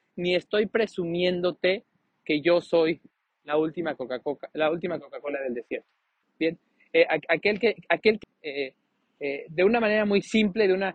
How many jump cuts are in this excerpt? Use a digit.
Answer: 2